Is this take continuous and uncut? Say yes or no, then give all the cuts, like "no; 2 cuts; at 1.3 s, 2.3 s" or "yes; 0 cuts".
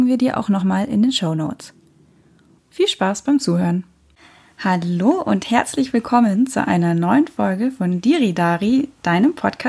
no; 1 cut; at 2.6 s